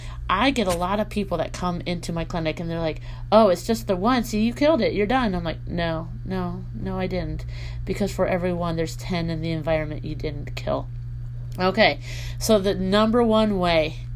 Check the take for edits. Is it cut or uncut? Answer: uncut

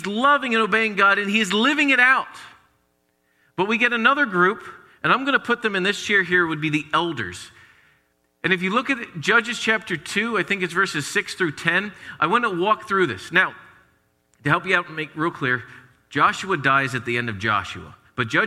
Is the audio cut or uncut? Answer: uncut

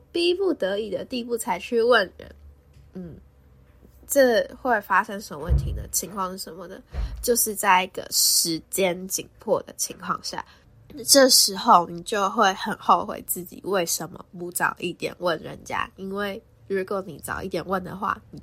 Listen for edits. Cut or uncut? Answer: uncut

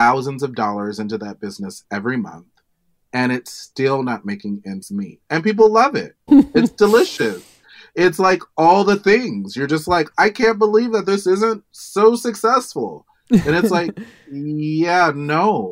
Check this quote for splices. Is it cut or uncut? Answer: cut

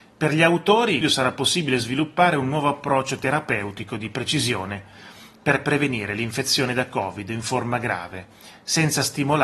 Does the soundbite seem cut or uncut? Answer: cut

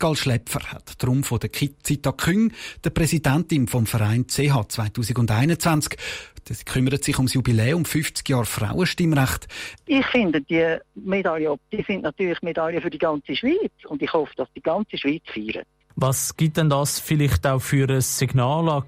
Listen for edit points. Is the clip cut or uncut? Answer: cut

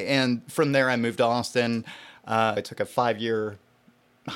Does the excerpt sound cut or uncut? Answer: cut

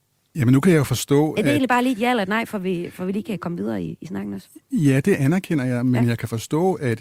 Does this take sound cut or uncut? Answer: uncut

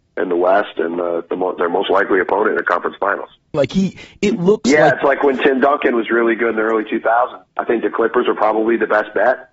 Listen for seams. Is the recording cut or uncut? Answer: cut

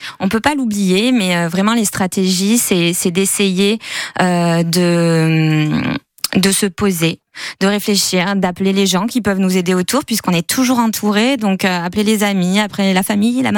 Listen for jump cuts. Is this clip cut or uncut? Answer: uncut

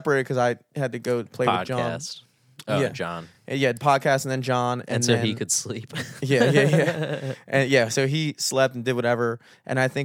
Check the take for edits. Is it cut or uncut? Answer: uncut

